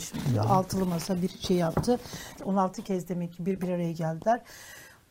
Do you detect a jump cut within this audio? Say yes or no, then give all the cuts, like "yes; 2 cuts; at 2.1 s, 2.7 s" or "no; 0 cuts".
yes; 1 cut; at 2.4 s